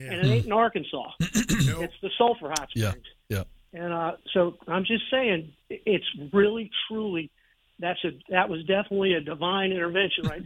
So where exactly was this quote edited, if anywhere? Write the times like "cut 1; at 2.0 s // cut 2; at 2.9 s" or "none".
none